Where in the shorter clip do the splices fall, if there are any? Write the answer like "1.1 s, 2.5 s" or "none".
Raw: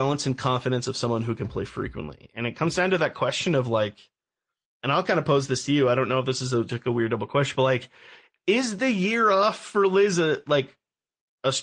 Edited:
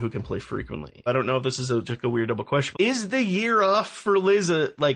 1.1 s, 2.7 s